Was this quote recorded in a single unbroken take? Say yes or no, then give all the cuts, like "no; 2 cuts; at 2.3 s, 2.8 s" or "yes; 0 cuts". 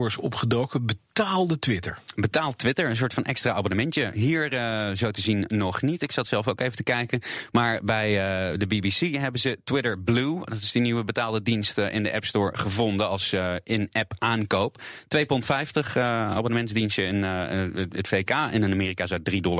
yes; 0 cuts